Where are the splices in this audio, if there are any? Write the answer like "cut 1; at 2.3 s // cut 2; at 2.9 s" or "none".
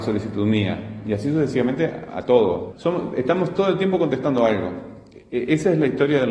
cut 1; at 2.7 s